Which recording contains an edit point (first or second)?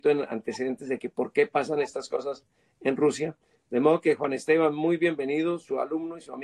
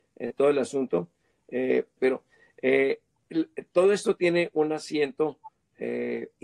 second